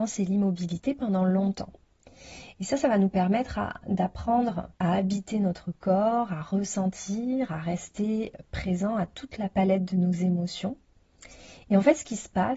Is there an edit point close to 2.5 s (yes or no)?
no